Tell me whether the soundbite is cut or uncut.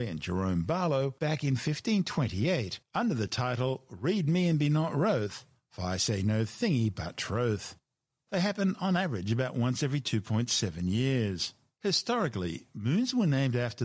cut